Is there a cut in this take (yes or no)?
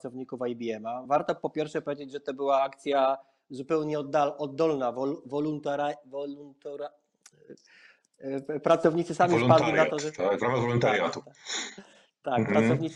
no